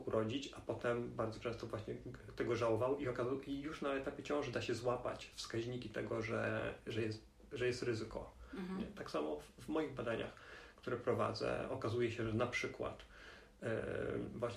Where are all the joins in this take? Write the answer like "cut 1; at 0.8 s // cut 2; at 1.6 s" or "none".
none